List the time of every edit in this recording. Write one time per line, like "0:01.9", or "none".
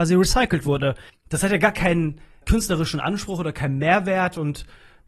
0:01.1
0:02.4